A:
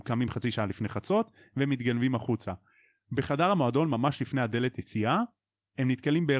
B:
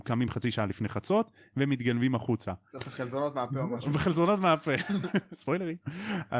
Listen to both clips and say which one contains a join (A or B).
B